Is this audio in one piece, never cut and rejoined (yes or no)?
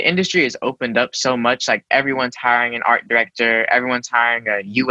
yes